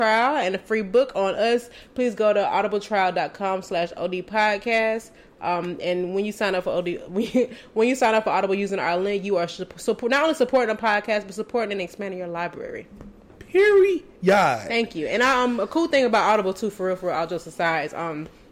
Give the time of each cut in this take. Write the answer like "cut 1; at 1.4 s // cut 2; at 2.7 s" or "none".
none